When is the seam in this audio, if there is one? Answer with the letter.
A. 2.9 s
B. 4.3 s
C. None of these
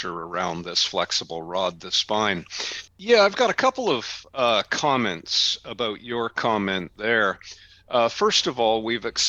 A